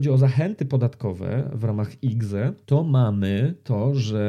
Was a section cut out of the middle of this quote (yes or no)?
yes